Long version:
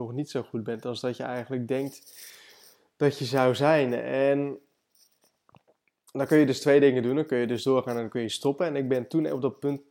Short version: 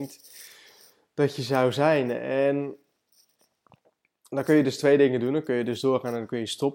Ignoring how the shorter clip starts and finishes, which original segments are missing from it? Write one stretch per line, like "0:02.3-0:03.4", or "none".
none